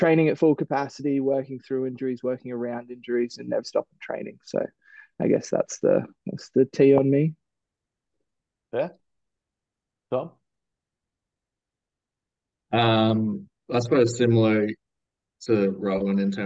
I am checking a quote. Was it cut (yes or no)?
yes